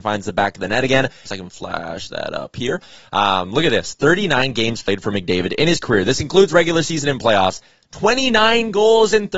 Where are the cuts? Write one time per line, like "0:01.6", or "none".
0:01.3